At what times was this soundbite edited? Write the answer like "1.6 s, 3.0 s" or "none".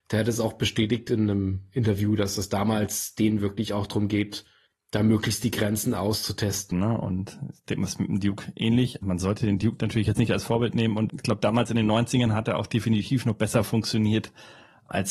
6.7 s, 9.0 s, 11.1 s